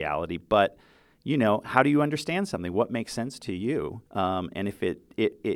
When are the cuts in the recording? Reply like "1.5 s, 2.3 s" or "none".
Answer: 4.1 s